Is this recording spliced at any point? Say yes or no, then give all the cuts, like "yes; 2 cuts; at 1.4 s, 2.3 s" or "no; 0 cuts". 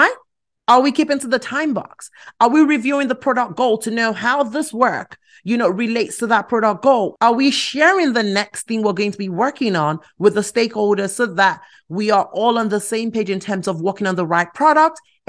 no; 0 cuts